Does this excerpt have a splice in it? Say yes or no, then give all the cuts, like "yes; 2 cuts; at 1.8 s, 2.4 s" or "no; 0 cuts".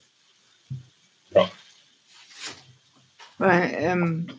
no; 0 cuts